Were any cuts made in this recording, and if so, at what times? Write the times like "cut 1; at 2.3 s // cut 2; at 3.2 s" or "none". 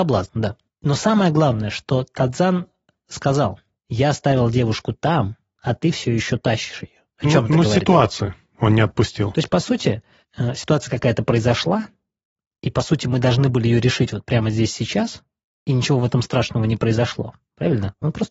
none